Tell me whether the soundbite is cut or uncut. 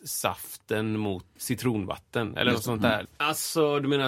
cut